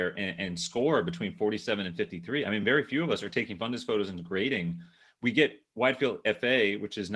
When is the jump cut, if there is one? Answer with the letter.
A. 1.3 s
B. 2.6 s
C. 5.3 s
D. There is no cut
D